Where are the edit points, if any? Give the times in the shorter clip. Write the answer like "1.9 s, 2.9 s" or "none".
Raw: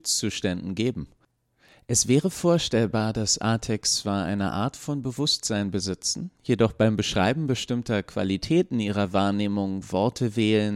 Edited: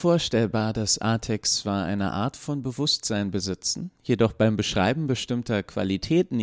none